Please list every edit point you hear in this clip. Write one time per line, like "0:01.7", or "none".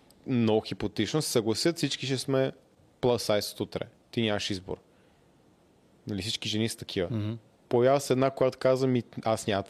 none